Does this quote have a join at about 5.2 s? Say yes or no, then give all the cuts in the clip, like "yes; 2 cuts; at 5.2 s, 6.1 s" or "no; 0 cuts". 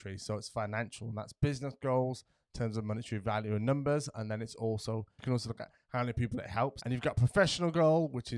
yes; 2 cuts; at 5.2 s, 6.8 s